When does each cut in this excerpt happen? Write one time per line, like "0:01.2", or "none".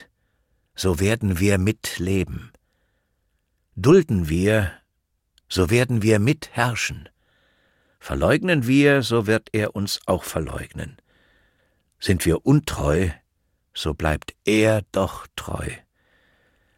none